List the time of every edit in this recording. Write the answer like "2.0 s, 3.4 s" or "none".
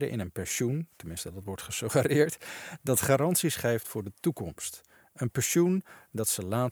none